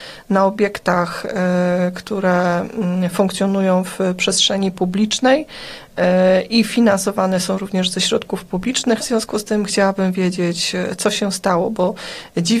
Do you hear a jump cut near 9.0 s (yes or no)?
yes